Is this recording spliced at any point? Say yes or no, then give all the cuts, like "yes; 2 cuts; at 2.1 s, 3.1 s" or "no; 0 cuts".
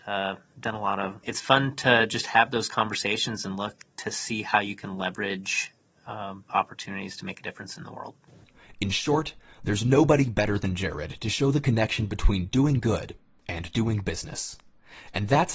yes; 2 cuts; at 1.2 s, 6.5 s